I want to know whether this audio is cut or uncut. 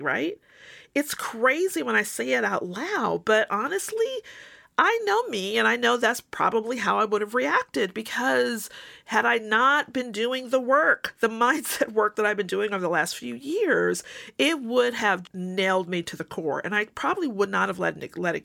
cut